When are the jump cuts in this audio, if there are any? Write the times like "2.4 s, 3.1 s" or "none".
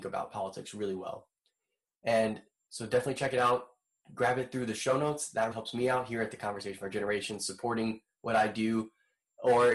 5.5 s